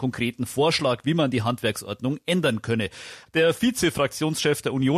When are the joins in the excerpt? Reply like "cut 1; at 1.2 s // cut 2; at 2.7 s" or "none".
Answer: cut 1; at 3.3 s